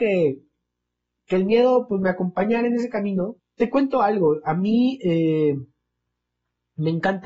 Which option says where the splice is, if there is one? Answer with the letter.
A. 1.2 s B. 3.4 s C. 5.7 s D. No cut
B